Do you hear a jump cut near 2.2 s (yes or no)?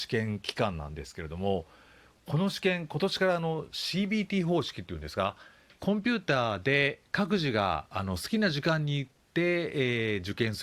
no